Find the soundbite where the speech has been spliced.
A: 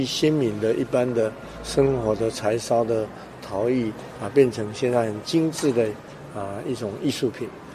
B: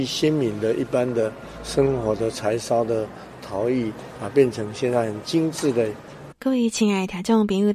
B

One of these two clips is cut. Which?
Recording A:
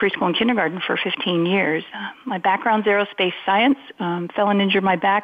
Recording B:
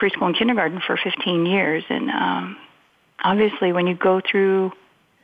A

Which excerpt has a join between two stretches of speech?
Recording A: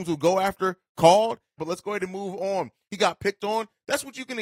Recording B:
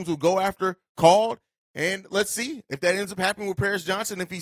A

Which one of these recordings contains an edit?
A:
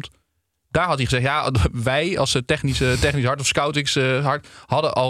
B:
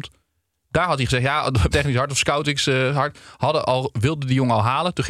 B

